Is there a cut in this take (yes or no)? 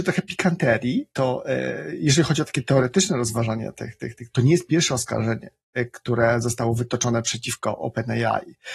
yes